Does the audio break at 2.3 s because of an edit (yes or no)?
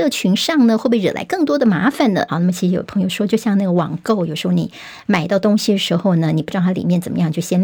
yes